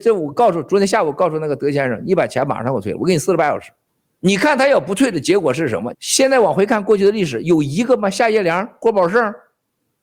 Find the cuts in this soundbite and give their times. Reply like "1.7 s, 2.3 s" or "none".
5.9 s